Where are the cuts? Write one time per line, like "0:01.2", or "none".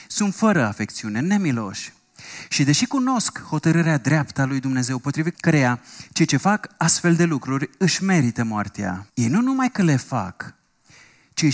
0:05.3
0:09.1